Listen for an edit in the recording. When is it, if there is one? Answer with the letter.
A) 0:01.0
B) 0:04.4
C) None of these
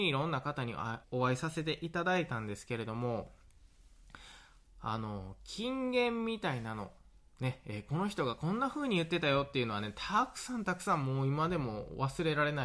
A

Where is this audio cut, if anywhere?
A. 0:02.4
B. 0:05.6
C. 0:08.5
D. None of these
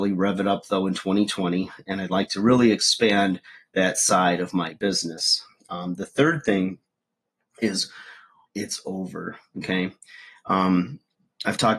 C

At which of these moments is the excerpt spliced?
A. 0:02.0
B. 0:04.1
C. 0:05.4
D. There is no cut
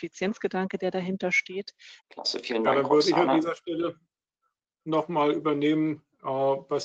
A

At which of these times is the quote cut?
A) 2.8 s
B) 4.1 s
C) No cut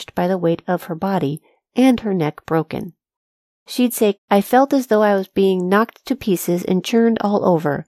B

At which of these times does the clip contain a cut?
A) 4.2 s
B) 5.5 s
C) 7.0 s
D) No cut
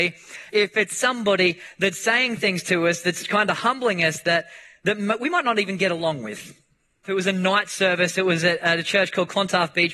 C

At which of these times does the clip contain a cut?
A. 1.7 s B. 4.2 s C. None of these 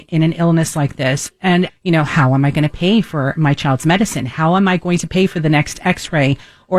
A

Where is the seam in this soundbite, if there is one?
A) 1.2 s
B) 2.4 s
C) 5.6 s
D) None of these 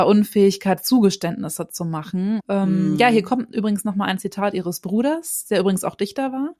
B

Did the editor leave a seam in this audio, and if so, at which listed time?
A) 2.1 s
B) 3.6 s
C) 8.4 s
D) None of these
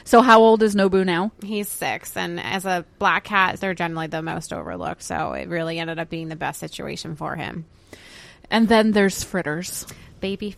B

